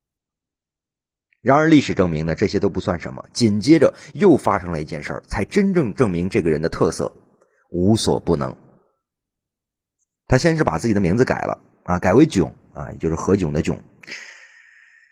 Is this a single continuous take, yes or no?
yes